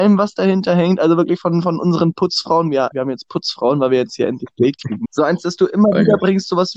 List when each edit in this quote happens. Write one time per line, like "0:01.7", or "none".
0:02.9
0:05.0